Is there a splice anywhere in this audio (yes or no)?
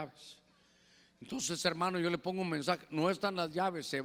no